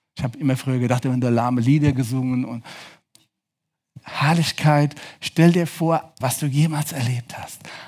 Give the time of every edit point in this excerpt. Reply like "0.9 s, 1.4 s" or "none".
1.0 s, 6.2 s

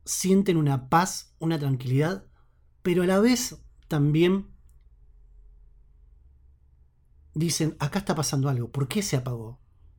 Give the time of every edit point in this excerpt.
none

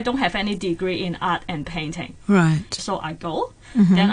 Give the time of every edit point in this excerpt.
2.8 s

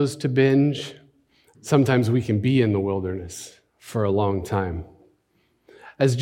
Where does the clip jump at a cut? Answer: 1.5 s, 3.7 s

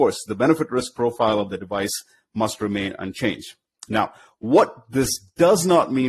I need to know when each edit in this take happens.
none

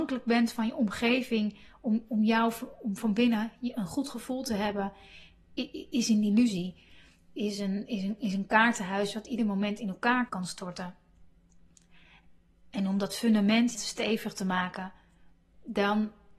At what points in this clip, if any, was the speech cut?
10.3 s, 13.7 s

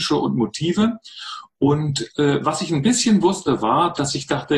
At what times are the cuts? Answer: none

